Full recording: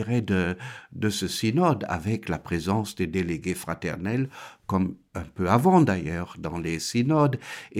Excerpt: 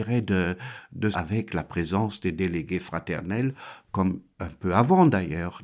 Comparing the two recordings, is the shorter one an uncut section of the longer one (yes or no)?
no